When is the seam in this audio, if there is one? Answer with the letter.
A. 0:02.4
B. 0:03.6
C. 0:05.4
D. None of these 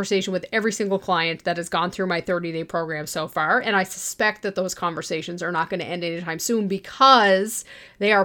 D